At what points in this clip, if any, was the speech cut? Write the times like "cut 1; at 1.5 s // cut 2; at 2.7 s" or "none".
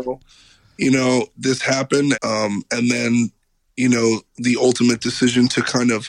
cut 1; at 2.1 s